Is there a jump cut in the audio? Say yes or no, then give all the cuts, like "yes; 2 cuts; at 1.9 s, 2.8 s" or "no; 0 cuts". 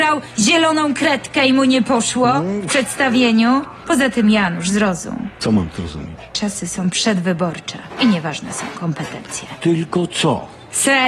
no; 0 cuts